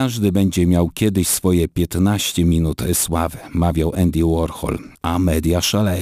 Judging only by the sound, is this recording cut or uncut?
cut